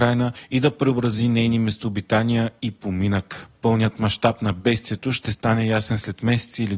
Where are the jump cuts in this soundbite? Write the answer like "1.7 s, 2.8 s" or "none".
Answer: none